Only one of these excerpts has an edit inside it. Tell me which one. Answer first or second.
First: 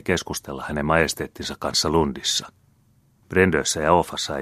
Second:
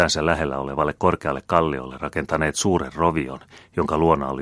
first